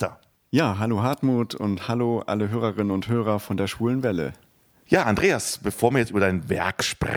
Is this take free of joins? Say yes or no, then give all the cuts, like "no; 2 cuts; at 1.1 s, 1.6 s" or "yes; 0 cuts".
yes; 0 cuts